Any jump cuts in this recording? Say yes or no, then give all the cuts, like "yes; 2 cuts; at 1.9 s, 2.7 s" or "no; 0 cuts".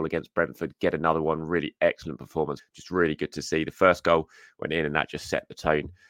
yes; 1 cut; at 2.6 s